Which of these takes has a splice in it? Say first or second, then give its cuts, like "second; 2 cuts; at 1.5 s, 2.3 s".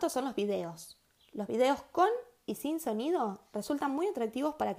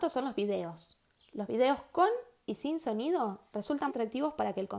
second; 1 cut; at 3.9 s